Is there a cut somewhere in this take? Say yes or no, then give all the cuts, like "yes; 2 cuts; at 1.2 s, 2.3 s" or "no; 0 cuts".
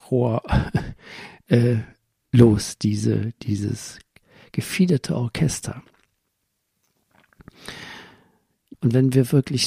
yes; 1 cut; at 8.7 s